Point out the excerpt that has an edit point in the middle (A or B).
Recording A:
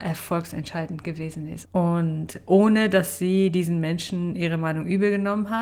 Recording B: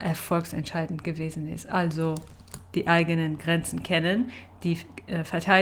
A